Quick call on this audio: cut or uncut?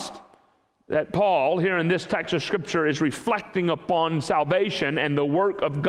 uncut